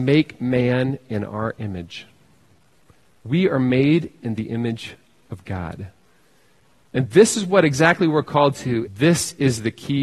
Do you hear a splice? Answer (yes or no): yes